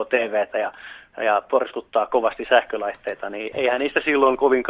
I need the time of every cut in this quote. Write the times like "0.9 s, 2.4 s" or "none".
3.5 s